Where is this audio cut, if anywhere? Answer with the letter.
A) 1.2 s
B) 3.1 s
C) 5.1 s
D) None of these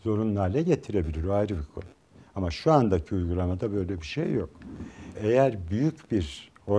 C